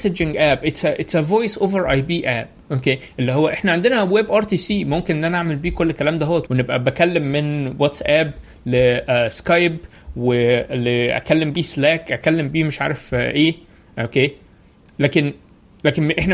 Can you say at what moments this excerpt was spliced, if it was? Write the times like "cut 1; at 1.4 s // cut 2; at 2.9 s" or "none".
cut 1; at 6.5 s